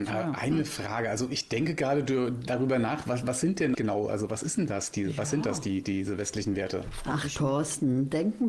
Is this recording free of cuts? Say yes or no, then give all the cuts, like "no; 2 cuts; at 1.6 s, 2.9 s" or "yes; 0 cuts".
no; 1 cut; at 3.7 s